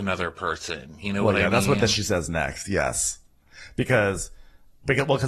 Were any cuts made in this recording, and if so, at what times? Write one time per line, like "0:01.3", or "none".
none